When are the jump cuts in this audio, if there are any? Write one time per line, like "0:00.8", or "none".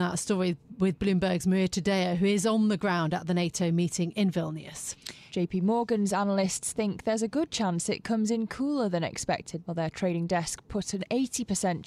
0:05.3
0:09.6